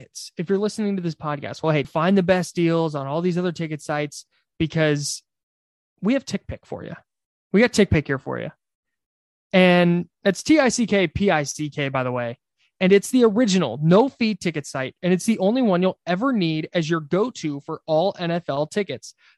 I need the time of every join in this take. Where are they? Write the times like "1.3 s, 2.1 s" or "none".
1.8 s